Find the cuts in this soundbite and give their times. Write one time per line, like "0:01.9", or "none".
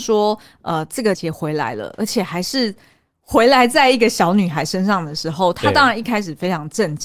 0:01.1